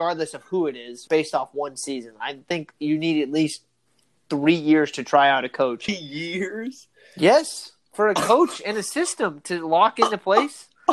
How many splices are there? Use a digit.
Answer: 2